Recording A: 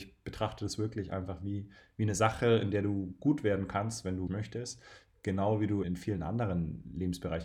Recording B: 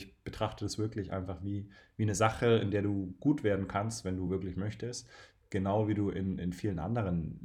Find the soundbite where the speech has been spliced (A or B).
A